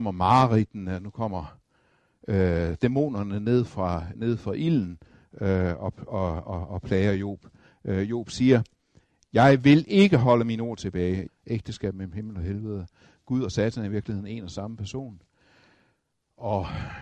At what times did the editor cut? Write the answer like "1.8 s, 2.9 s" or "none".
4.1 s, 11.3 s